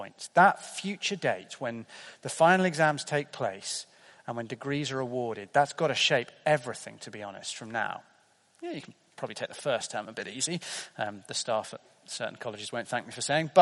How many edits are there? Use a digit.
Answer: 0